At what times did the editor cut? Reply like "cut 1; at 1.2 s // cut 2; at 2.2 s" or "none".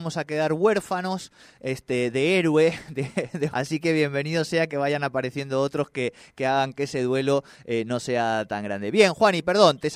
cut 1; at 3.5 s